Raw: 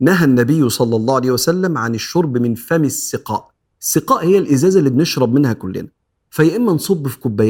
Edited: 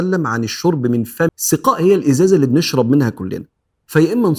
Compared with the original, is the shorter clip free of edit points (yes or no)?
no